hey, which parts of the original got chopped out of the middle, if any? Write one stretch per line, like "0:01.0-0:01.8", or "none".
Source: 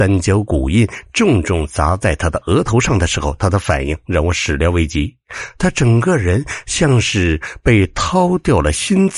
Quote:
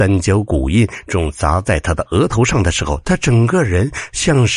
0:01.1-0:01.4
0:03.4-0:05.5

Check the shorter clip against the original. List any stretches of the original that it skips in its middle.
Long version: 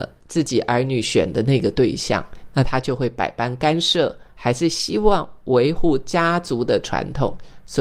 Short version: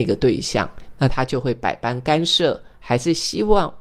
none

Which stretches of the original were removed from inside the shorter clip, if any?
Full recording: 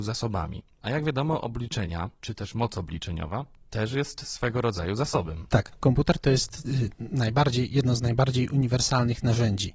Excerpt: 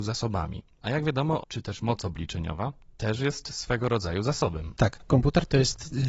0:01.4-0:02.1

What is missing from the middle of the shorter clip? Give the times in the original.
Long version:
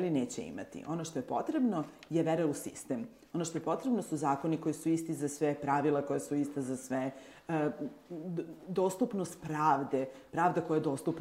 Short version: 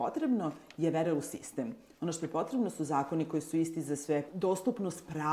0:05.6-0:08.6

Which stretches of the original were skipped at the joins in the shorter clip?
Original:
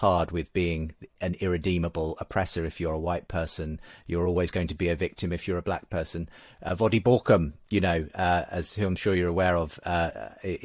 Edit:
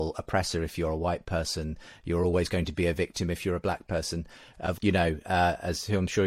0:06.8-0:07.6

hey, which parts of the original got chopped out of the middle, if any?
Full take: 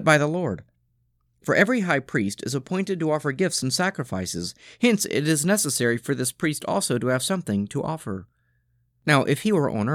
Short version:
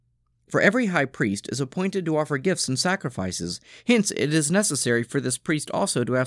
none

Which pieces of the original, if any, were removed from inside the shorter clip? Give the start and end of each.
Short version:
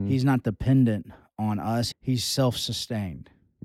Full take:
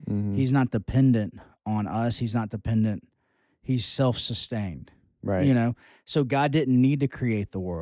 0:02.2-0:03.5

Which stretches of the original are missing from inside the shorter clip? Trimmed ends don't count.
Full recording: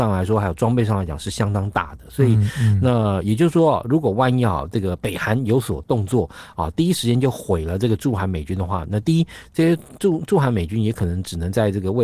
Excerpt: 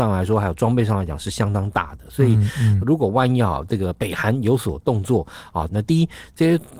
0:02.8-0:03.8
0:06.7-0:08.9

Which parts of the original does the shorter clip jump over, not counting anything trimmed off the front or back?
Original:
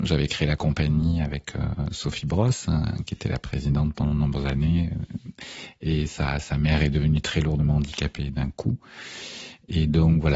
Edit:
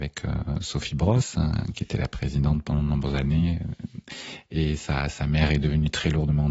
none

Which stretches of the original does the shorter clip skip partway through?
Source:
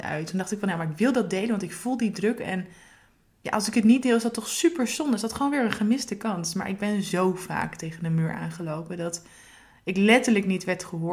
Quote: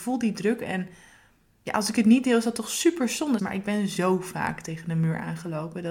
0:05.2-0:06.5

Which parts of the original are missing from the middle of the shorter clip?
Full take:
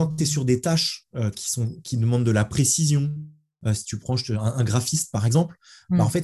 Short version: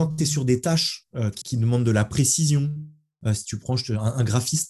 0:01.4-0:01.8

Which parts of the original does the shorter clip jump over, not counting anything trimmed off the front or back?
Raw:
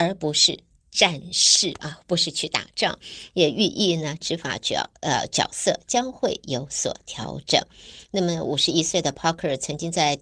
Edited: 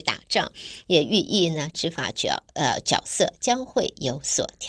none

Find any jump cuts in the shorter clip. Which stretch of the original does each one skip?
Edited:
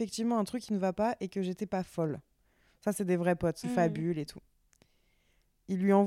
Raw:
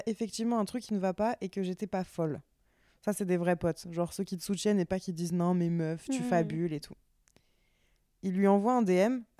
0:03.8-0:06.2

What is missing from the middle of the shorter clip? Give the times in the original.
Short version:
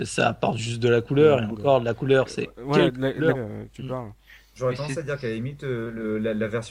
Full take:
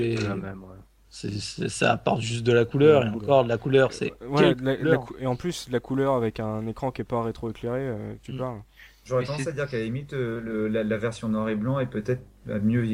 0:05.0-0:07.8

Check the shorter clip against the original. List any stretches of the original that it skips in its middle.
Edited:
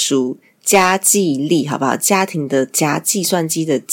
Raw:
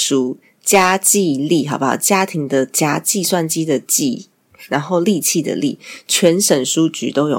none

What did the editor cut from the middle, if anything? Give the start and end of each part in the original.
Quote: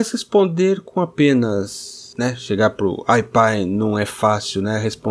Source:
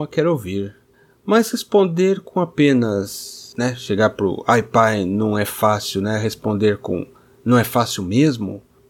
none

